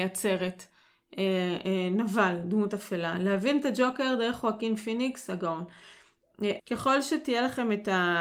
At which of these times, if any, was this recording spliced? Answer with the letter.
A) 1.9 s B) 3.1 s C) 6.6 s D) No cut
C